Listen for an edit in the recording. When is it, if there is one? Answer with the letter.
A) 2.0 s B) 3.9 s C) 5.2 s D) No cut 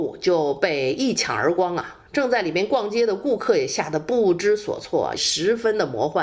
C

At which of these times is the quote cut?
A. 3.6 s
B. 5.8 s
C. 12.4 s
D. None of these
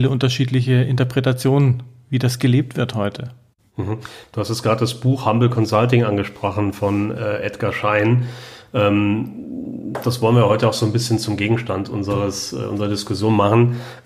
D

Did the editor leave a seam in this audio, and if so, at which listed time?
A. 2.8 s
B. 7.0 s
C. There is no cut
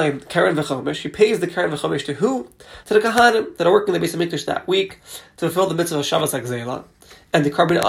A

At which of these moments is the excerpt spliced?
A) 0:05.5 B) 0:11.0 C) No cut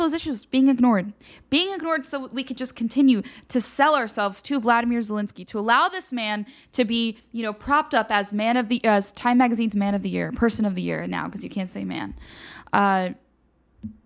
C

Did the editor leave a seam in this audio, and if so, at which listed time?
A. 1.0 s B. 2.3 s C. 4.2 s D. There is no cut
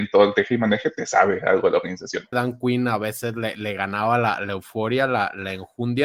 B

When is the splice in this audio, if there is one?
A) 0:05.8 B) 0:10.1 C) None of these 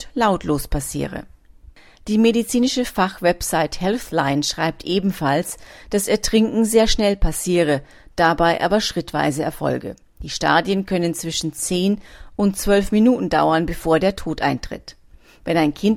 C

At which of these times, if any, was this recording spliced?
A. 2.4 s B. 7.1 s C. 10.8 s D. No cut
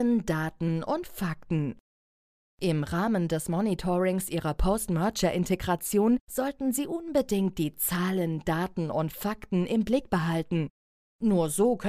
D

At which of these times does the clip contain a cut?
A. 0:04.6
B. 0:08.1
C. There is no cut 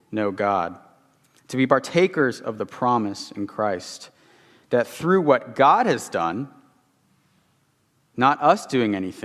A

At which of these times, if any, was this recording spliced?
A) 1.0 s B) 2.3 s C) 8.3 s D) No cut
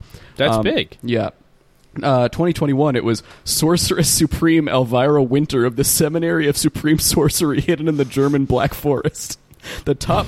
D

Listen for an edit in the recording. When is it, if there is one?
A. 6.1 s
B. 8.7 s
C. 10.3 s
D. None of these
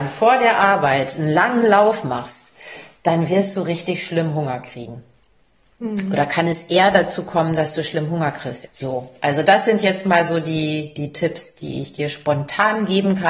B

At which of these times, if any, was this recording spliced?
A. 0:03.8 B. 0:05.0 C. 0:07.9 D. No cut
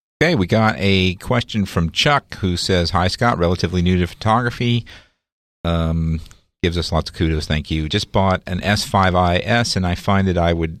D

